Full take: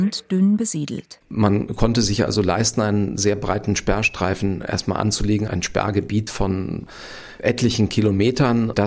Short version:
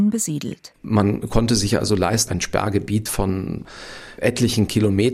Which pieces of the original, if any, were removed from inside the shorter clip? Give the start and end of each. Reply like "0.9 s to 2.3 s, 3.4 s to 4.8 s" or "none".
2.7 s to 5.5 s